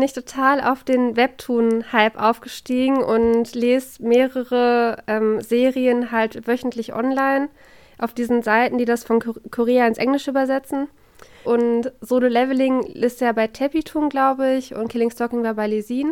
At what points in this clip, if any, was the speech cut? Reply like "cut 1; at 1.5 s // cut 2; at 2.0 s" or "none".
cut 1; at 11.5 s